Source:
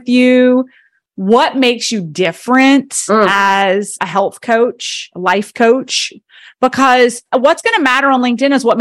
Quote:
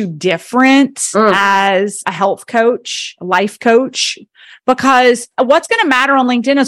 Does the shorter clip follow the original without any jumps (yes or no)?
yes